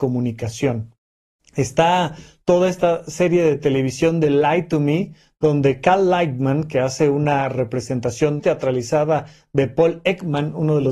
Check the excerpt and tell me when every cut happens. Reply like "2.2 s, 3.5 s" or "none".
8.4 s